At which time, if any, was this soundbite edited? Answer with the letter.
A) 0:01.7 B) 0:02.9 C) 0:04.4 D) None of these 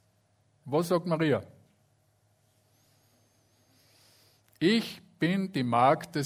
D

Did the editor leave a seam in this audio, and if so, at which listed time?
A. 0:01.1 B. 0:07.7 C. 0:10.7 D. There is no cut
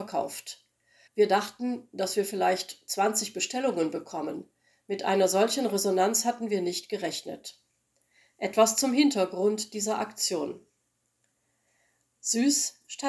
A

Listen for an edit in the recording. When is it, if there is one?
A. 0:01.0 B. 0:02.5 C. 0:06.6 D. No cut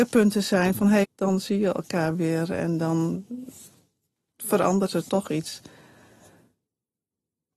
A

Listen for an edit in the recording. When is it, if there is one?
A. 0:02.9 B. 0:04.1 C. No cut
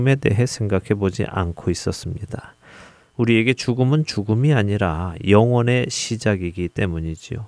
C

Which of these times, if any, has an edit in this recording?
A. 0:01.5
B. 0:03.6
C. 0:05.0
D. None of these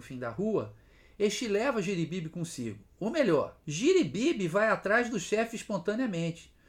B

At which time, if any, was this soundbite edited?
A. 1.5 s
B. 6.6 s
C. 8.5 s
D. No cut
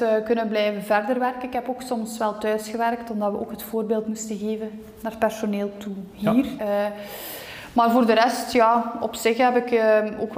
B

